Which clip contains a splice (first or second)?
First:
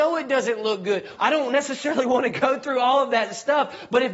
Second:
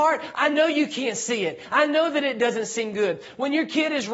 first